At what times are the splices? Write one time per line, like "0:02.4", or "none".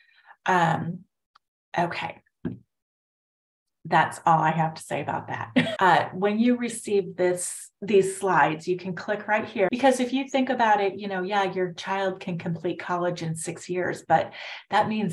0:05.8
0:09.7

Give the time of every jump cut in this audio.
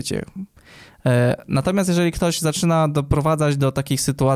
none

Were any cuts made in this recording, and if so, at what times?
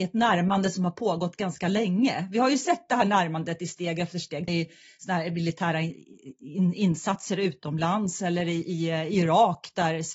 0:04.5

